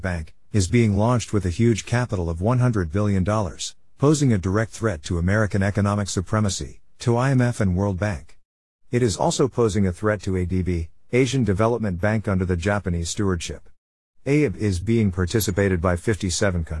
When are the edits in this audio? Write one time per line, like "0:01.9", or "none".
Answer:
none